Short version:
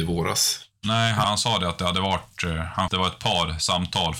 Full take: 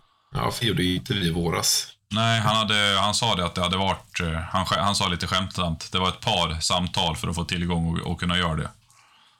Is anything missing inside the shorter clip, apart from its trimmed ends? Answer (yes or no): yes